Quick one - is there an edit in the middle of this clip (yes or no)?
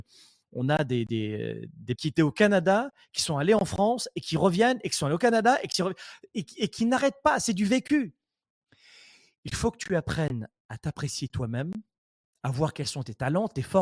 yes